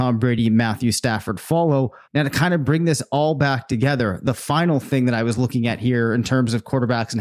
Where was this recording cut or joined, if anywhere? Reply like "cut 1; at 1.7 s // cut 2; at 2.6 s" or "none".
cut 1; at 2.0 s